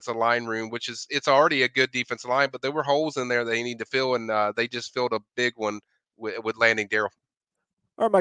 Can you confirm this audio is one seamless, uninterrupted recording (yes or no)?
yes